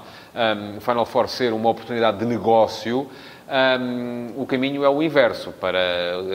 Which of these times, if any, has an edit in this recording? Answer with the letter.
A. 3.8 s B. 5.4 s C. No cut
C